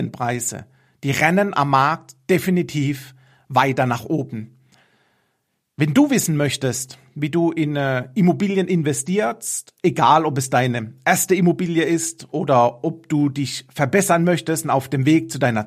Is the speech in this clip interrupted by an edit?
no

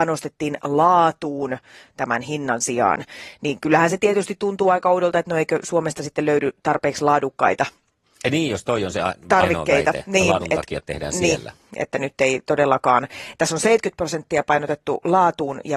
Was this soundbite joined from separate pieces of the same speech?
no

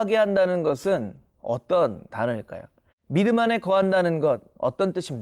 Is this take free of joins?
no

